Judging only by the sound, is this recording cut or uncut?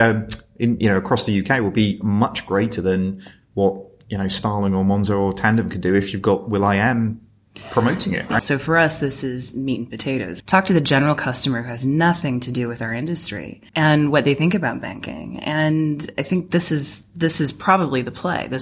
cut